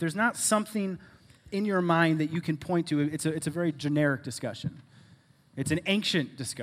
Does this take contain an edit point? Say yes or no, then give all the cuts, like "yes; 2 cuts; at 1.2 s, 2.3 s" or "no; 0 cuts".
no; 0 cuts